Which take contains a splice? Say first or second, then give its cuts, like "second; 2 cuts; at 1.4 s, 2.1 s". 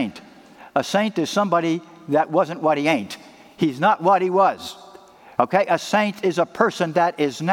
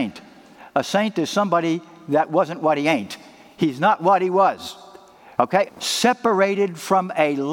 second; 1 cut; at 5.7 s